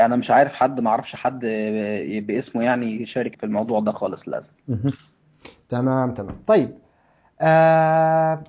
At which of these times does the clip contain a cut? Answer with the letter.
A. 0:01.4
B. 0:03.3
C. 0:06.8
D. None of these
B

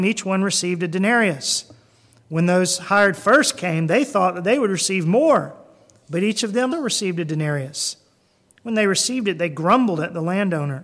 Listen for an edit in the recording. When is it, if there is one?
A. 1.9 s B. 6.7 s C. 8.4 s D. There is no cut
B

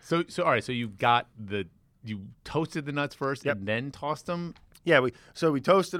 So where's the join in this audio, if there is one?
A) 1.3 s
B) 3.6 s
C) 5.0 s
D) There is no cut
A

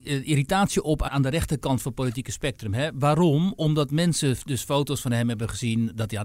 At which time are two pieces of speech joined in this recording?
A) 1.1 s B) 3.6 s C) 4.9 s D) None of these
A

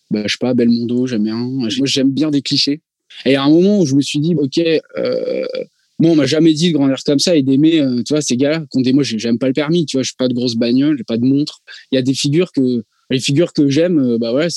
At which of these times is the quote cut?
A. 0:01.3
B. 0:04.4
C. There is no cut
B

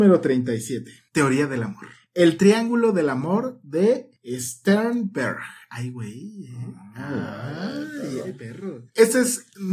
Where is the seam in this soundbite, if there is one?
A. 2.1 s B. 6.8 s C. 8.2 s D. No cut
C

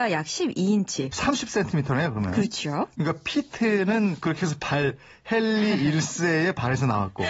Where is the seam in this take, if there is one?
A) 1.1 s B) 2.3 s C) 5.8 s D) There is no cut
A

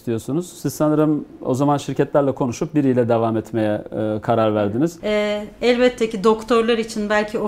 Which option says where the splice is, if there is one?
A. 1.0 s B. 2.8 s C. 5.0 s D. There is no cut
C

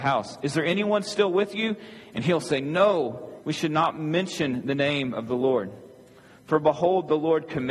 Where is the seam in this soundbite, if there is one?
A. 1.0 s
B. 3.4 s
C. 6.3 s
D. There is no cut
B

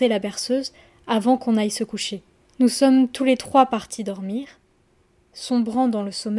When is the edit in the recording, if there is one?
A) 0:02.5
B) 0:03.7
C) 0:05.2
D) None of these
A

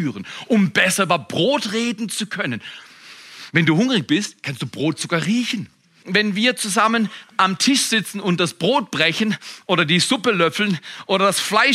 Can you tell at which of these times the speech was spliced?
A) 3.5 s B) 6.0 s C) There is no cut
B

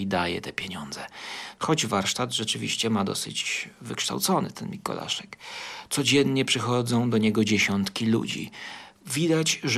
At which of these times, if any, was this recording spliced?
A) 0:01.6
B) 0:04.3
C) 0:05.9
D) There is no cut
A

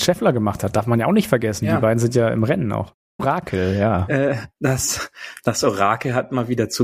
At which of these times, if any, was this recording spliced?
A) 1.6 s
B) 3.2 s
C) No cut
B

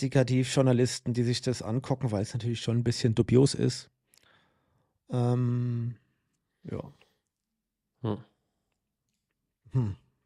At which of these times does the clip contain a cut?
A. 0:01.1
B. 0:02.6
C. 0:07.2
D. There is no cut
D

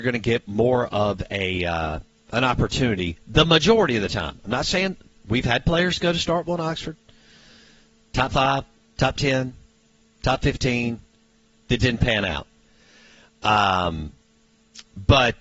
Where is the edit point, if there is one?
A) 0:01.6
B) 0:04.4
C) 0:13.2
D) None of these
D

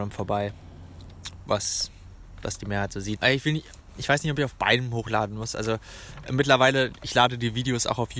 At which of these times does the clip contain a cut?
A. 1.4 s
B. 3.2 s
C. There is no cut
B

